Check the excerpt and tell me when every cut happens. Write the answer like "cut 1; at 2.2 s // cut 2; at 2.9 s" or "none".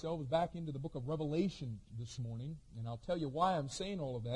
none